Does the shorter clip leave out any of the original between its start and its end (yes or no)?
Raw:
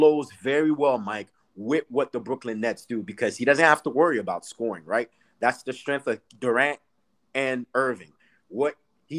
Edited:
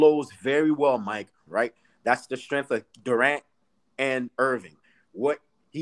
yes